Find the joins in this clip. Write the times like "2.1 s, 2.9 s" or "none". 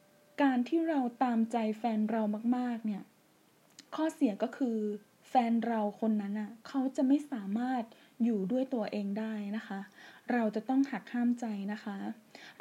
3.9 s